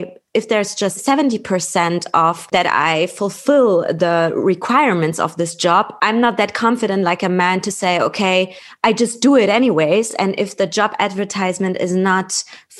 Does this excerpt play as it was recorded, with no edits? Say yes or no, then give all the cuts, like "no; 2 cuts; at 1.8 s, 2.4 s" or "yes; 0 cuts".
yes; 0 cuts